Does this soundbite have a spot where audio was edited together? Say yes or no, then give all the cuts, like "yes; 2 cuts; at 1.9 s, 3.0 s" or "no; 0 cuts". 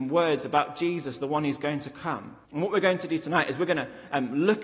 yes; 1 cut; at 2.4 s